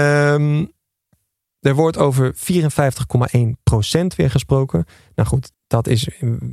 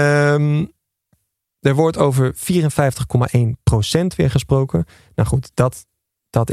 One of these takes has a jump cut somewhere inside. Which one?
first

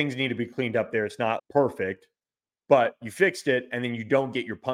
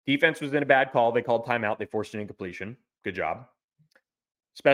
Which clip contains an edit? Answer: first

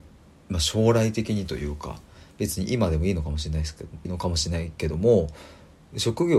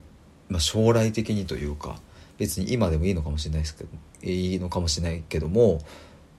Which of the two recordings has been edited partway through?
first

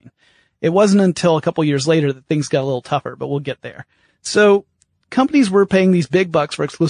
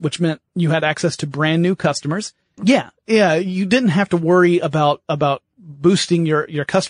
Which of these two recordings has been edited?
second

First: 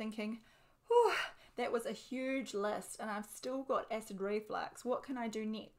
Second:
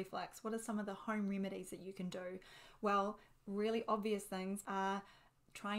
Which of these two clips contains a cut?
second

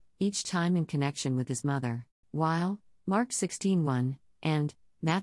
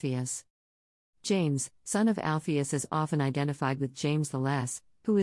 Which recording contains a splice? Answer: first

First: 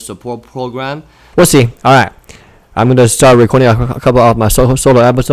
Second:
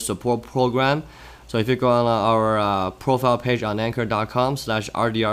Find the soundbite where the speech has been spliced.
first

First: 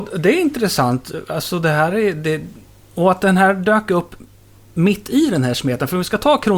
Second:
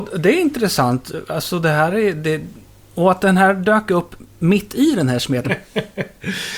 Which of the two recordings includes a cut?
second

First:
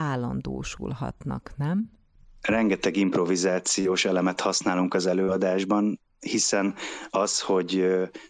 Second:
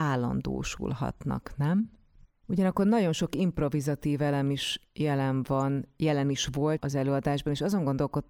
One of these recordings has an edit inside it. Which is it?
second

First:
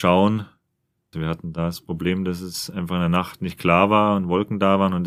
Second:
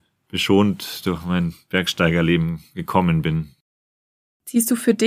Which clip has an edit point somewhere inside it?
first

